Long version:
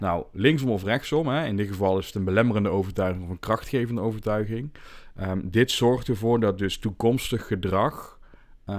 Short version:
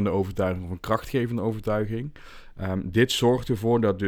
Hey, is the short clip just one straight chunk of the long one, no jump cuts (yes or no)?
yes